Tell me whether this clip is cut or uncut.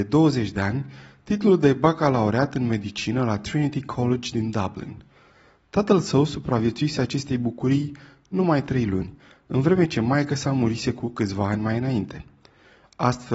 uncut